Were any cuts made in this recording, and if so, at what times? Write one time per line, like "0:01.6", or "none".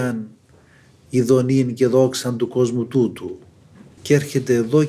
0:04.0